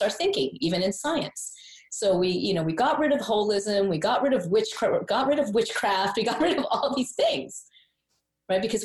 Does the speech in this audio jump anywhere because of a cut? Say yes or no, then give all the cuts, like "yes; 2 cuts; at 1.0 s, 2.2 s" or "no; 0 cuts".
no; 0 cuts